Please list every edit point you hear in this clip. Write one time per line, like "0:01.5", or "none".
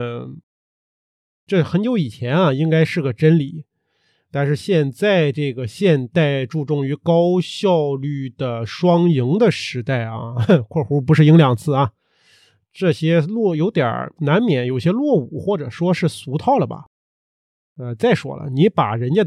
none